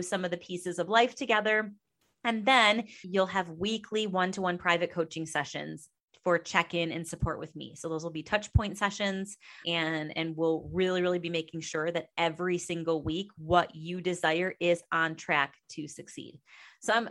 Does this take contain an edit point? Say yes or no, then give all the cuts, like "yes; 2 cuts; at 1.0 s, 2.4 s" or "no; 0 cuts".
yes; 2 cuts; at 3.0 s, 9.6 s